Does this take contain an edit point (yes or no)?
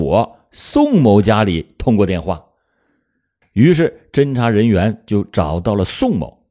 no